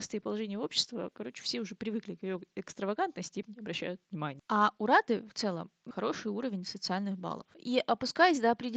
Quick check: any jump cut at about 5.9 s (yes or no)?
yes